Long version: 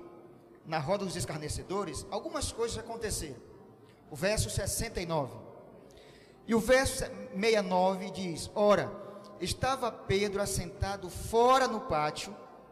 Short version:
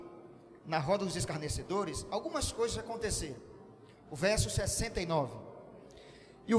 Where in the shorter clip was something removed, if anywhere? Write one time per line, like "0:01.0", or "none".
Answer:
none